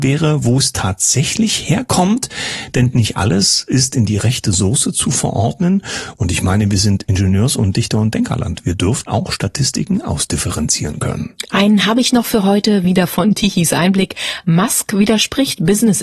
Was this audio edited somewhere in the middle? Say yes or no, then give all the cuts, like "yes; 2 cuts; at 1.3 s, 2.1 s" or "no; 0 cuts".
yes; 1 cut; at 9.1 s